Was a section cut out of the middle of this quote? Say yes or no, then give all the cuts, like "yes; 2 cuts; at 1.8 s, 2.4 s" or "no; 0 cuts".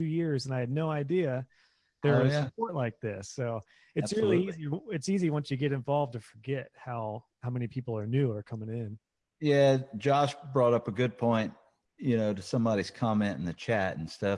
no; 0 cuts